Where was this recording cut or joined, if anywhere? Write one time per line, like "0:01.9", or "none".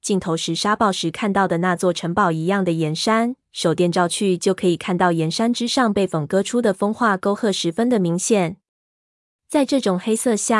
0:03.4

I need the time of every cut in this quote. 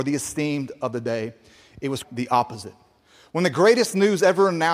0:02.0

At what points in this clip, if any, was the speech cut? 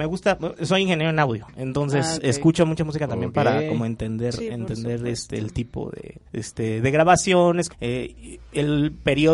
0:06.3
0:07.7

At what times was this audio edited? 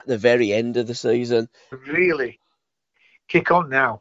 0:01.7

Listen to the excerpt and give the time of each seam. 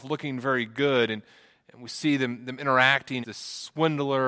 0:03.2

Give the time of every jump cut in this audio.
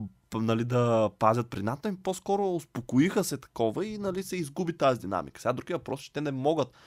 none

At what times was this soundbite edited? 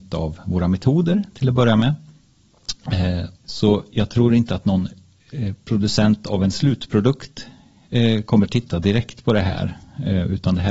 0:03.4

